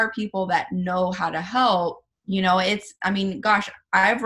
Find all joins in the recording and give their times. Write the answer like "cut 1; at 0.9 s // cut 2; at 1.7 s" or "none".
cut 1; at 2.1 s